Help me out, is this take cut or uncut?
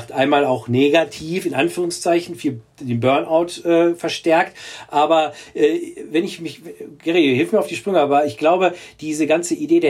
uncut